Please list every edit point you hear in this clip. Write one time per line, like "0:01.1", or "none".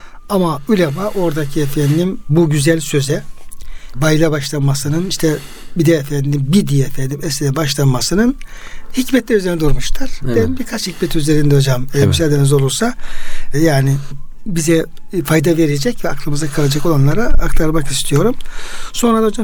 none